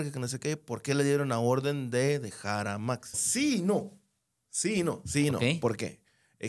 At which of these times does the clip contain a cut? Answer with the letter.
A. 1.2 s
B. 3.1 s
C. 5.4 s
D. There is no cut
B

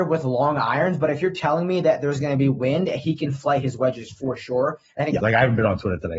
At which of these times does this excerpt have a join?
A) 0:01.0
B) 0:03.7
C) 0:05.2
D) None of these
C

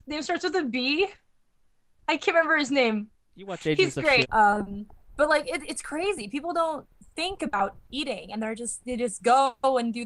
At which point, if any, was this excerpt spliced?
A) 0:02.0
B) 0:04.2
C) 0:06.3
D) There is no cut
B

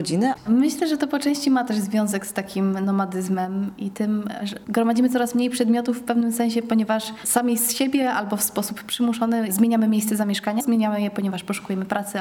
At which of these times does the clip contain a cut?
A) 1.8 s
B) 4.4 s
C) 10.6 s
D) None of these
C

